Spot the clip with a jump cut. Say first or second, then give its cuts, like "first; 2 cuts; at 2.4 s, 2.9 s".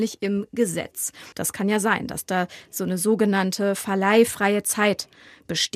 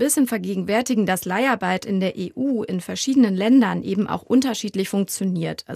first; 1 cut; at 1.3 s